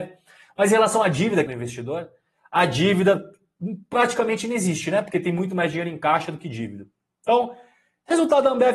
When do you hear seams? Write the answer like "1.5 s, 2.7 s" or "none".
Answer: 1.5 s